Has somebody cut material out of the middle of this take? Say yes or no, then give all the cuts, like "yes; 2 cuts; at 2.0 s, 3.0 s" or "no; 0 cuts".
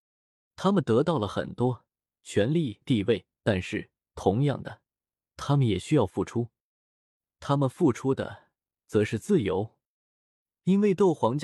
yes; 1 cut; at 2.8 s